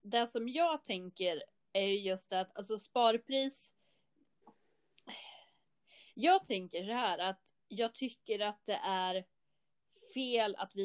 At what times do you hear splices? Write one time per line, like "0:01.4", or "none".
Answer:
none